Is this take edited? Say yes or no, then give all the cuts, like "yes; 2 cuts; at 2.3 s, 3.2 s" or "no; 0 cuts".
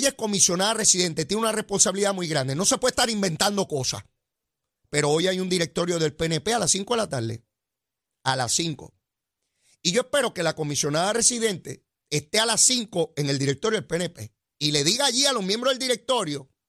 no; 0 cuts